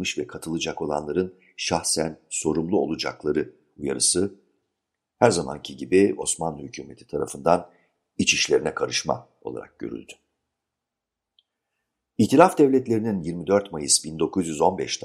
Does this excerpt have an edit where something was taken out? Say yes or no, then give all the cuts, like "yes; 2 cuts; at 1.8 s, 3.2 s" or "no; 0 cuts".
no; 0 cuts